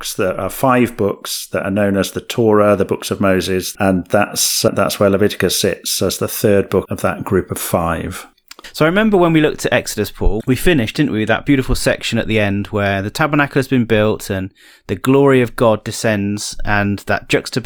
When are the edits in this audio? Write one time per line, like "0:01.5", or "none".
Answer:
0:03.7
0:06.9